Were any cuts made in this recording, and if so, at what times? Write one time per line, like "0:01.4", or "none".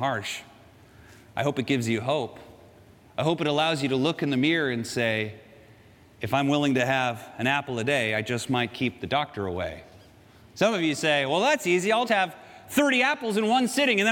0:12.1